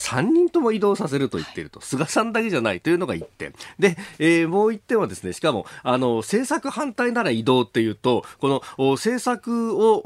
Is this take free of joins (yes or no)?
yes